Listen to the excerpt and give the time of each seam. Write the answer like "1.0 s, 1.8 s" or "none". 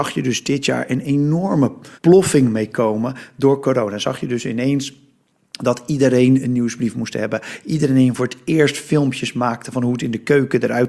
1.9 s, 7.6 s